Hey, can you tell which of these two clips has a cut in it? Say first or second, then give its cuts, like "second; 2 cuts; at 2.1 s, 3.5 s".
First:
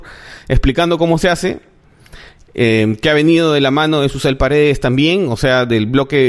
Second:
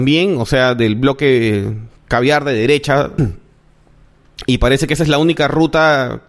second; 2 cuts; at 2.0 s, 3.2 s